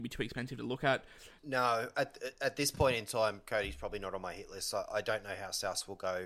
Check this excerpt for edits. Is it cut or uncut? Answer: cut